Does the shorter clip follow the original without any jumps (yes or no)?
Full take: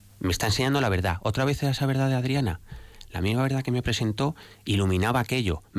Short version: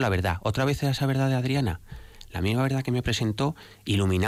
yes